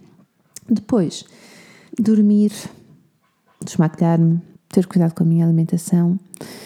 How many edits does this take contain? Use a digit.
2